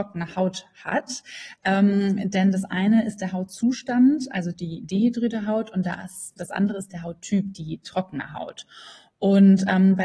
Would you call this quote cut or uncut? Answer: uncut